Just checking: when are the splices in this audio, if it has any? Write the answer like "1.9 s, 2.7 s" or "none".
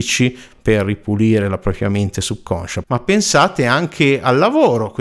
2.8 s

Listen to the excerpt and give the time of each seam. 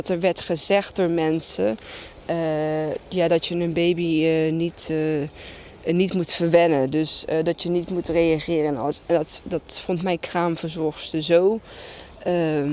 none

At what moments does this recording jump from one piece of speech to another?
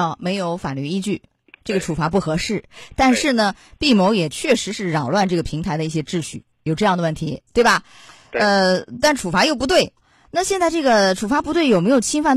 none

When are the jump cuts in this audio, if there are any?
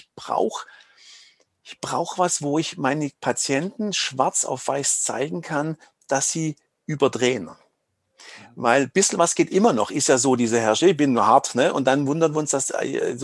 none

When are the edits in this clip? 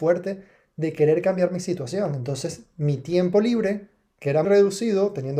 4.4 s

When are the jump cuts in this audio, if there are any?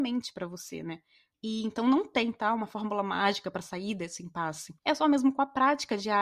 1.3 s, 4.8 s

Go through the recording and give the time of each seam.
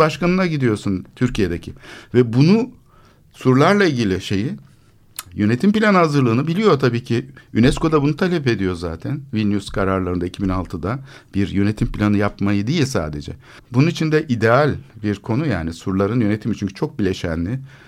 13.6 s

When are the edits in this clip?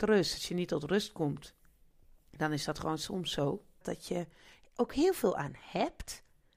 3.8 s

